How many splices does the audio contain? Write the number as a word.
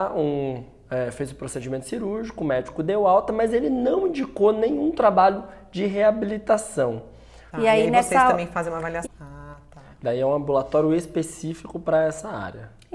two